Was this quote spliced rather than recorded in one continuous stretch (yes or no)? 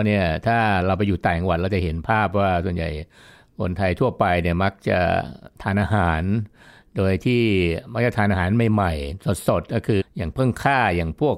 yes